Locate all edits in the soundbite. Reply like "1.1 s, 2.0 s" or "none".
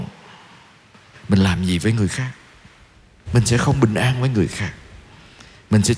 1.1 s